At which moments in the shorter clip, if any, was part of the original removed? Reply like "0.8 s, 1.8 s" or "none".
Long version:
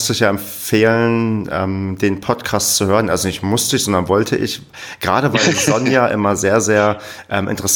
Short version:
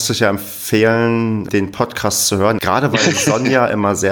1.5 s, 2.6 s